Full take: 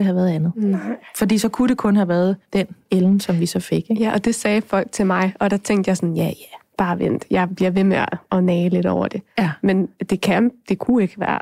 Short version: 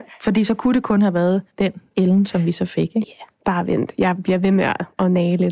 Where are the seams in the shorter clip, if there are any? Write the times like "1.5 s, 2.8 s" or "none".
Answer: 3.0 s